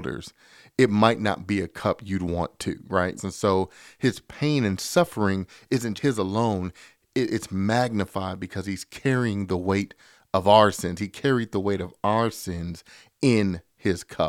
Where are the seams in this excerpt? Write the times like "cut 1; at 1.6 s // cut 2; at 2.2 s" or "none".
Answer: cut 1; at 3.2 s // cut 2; at 6.0 s